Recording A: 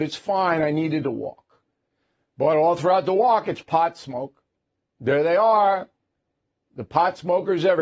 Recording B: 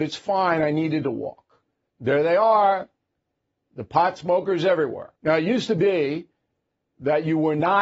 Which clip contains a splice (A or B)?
B